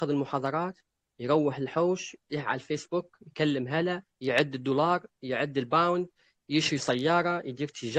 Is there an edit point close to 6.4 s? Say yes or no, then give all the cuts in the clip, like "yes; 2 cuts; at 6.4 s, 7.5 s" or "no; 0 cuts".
no; 1 cut; at 4.1 s